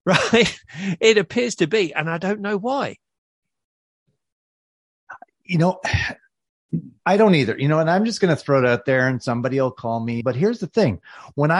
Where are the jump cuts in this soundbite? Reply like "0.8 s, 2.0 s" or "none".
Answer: 7.0 s, 10.2 s

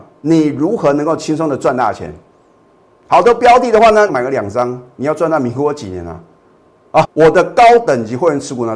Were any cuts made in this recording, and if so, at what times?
4.1 s, 7.0 s

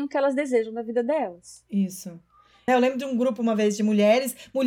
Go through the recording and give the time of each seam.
2.7 s

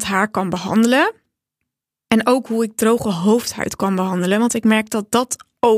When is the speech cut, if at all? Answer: none

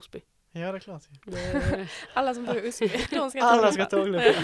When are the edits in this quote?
3.1 s

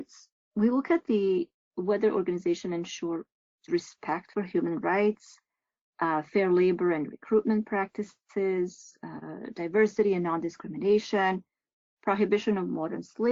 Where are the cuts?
none

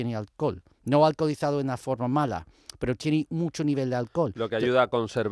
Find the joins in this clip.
none

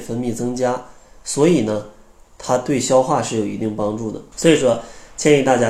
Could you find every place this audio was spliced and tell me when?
4.3 s

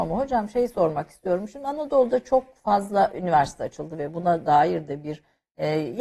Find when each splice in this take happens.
none

